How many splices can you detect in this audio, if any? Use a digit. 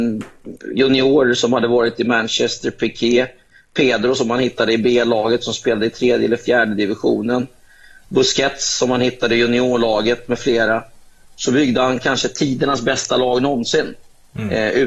0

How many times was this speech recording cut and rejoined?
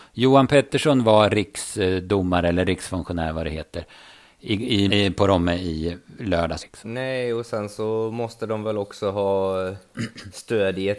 2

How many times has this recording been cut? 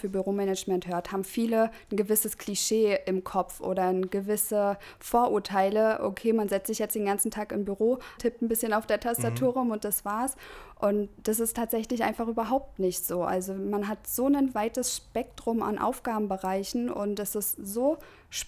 1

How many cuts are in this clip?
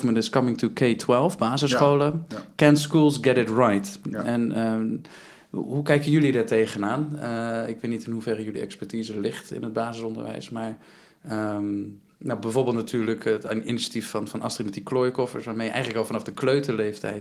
0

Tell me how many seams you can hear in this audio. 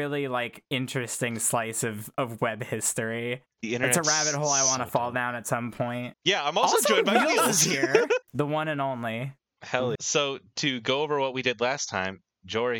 3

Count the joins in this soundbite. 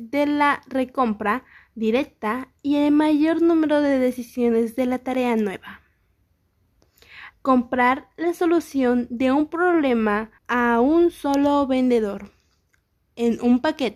2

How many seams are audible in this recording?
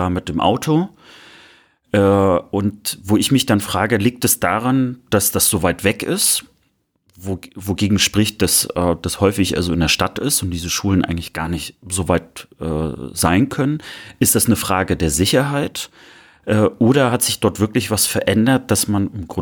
0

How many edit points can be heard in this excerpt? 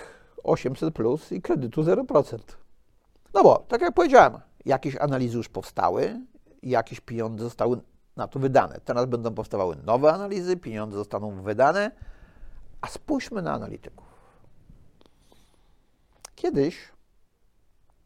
1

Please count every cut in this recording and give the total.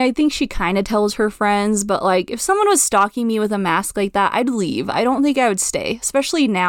0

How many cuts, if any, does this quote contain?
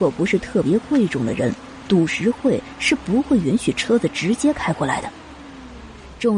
0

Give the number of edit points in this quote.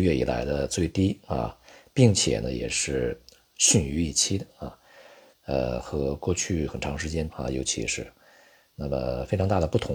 2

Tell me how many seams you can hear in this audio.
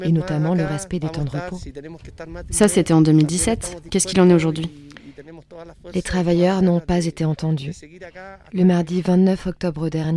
0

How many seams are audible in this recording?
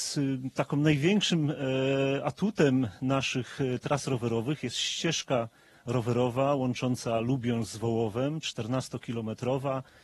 0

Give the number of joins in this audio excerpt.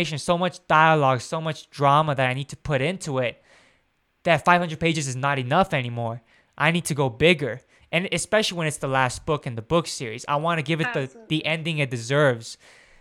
0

